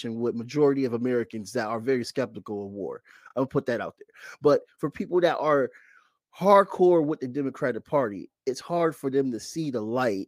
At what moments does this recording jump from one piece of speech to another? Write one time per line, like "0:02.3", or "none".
none